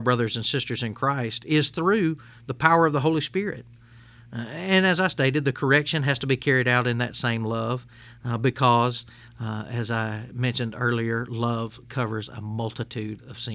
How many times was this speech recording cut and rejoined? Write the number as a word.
zero